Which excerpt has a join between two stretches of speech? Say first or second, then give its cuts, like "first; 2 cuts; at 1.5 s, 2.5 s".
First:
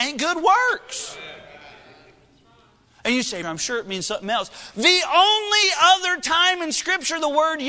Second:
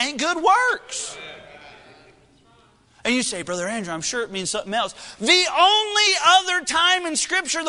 first; 1 cut; at 3.4 s